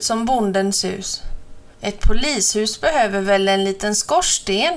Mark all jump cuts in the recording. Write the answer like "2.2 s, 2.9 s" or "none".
1.7 s